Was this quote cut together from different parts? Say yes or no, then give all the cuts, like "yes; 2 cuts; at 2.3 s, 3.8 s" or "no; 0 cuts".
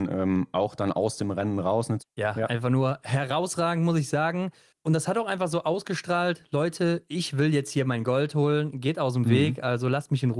yes; 1 cut; at 2.0 s